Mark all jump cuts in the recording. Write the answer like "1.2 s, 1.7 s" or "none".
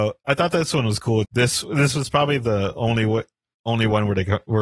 1.2 s